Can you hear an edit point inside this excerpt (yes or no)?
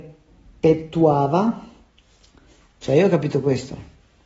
yes